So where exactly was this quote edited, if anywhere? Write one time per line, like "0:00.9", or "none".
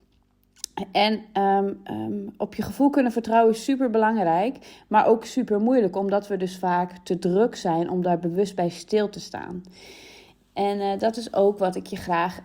none